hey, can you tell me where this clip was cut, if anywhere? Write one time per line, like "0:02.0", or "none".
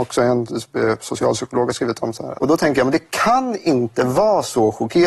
0:02.3